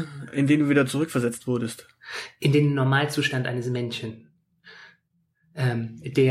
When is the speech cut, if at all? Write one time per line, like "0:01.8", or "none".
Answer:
none